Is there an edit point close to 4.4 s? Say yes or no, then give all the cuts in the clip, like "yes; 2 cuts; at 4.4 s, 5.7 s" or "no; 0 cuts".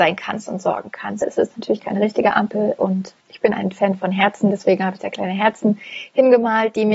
no; 2 cuts; at 1.2 s, 3.2 s